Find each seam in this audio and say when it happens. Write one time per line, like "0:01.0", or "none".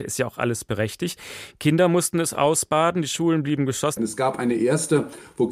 0:04.0